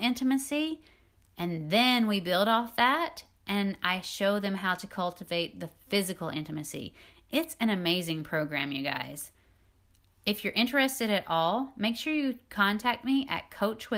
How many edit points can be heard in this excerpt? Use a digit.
0